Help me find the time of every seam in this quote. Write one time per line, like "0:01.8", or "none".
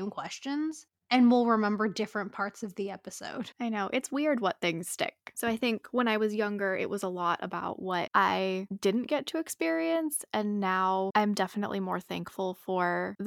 0:05.3

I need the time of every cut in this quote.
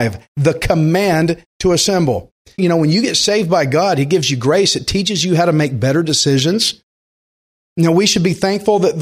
0:02.6

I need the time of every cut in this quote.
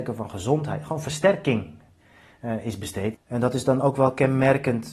0:03.1

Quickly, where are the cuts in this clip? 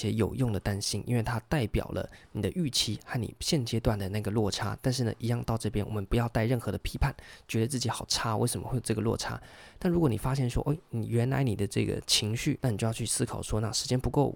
0:09.8
0:12.6

